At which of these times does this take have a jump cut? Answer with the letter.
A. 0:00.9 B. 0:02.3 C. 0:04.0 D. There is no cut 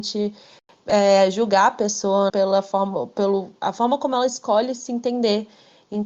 B